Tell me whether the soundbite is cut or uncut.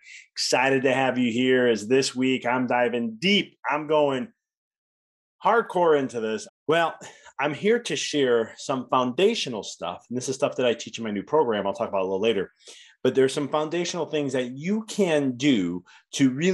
cut